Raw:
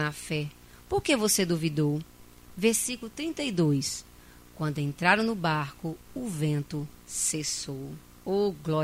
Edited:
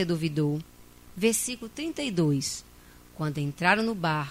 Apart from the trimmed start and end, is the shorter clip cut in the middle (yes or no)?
no